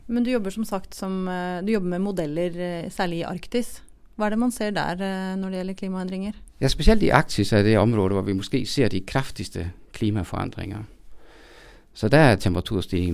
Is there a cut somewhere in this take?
no; 0 cuts

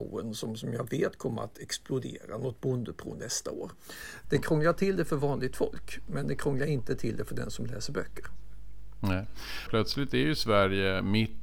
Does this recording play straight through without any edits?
no; 2 cuts; at 4.2 s, 9.7 s

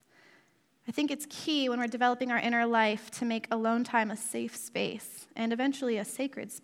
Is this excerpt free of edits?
yes; 0 cuts

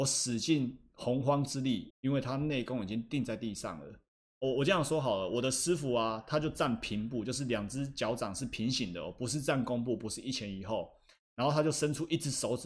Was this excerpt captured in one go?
no; 2 cuts; at 1.9 s, 4.2 s

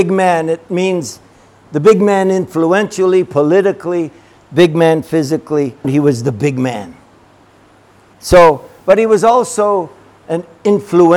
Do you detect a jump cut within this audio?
yes; 2 cuts; at 5.8 s, 8.1 s

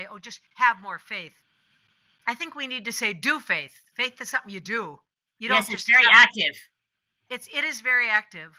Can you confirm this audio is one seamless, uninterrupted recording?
yes; 0 cuts

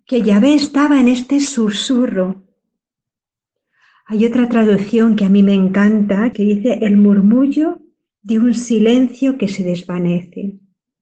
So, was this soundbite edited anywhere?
yes; 1 cut; at 6.3 s

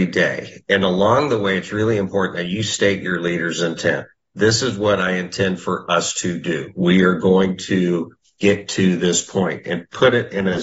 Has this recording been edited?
no; 0 cuts

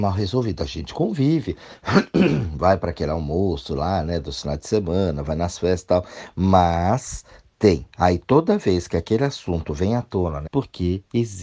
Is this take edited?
yes; 2 cuts; at 7.9 s, 10.5 s

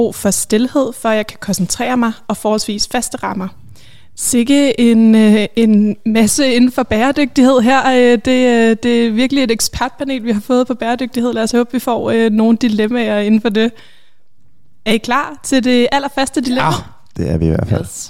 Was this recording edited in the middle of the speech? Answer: yes; 1 cut; at 4.2 s

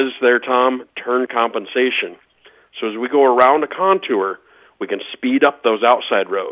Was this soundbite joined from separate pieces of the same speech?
no; 0 cuts

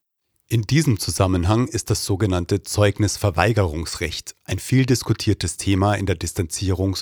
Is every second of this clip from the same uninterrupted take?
yes; 0 cuts

